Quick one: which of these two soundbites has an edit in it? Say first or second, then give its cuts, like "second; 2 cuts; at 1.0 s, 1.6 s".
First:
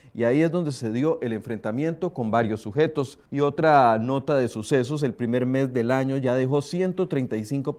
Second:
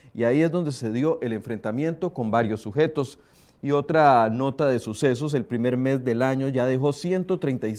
first; 1 cut; at 3.3 s